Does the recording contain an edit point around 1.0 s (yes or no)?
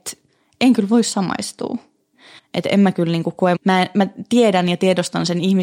no